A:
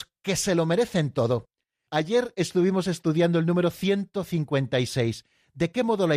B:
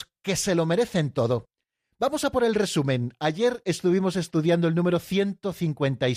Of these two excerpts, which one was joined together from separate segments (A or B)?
A